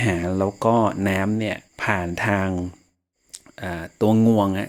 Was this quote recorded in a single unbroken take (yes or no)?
no